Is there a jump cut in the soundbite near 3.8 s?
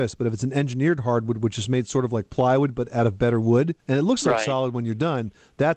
yes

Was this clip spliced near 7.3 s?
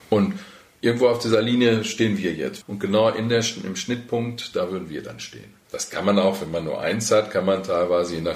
no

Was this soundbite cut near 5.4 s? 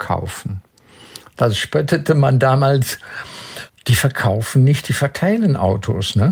no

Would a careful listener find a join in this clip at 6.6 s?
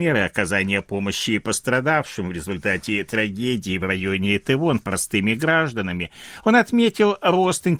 no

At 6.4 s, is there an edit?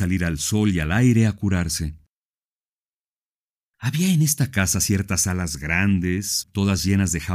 yes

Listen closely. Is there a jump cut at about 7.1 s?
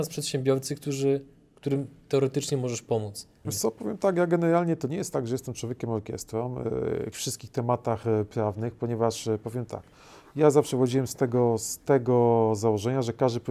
yes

